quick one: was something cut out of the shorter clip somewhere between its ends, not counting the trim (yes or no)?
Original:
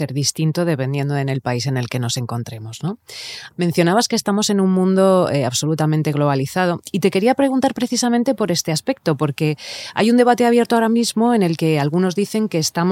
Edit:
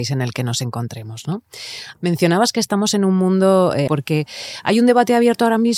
yes